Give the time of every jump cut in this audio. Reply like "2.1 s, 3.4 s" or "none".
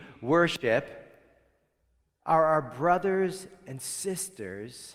none